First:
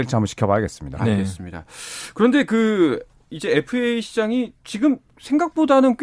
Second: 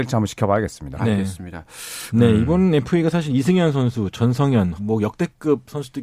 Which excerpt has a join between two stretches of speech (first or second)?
second